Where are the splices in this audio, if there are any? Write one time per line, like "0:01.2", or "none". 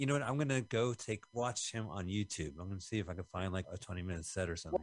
0:03.6